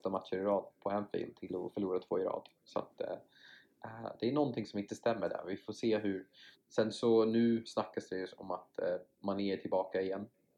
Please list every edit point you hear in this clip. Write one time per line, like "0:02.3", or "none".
0:06.5